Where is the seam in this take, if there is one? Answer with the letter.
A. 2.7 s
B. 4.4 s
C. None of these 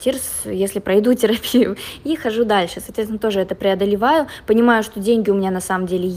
C